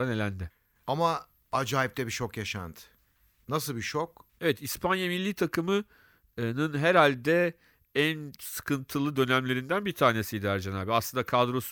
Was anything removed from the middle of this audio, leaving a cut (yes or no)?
yes